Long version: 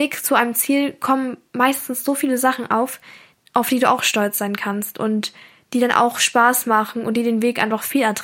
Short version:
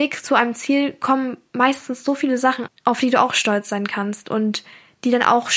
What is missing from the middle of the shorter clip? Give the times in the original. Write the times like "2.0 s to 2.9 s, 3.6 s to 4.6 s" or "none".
2.7 s to 3.4 s